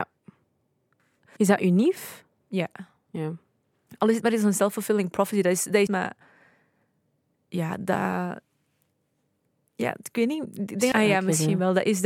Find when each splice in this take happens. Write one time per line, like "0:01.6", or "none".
0:01.4
0:05.9
0:10.9